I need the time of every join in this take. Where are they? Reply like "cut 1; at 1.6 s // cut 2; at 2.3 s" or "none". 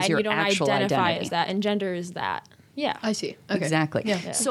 none